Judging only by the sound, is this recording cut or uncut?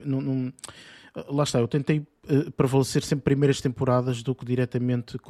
uncut